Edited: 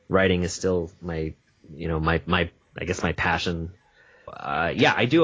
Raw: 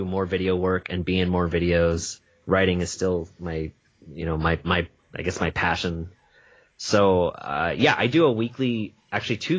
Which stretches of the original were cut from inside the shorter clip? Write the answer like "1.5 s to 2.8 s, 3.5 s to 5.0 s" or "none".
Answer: 6.7 s to 7.3 s